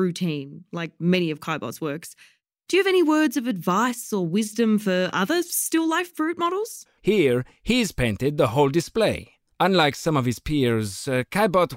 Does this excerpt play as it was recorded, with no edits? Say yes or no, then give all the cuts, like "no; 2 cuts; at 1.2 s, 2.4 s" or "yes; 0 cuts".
no; 2 cuts; at 7.0 s, 9.5 s